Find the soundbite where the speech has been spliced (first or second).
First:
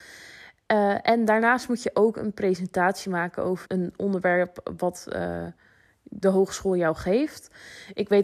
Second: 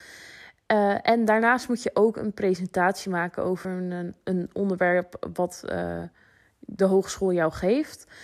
first